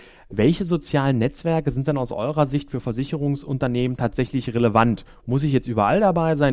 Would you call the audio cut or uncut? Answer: uncut